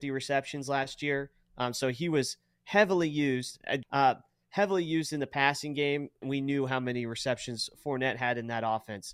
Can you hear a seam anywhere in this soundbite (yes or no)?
yes